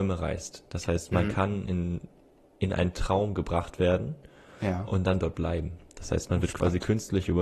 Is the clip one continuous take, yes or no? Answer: yes